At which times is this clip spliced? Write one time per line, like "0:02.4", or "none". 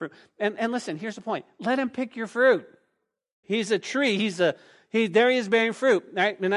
0:03.4